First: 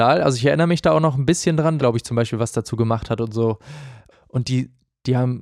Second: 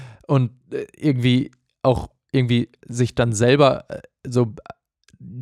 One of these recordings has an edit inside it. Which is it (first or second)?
first